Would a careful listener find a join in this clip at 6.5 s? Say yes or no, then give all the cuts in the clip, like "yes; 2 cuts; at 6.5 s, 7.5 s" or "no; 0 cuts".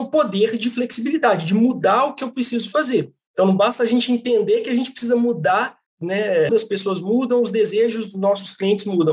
yes; 2 cuts; at 3.3 s, 6.5 s